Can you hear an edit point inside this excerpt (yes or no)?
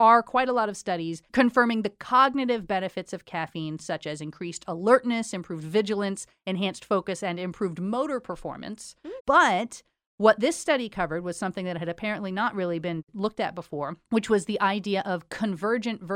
yes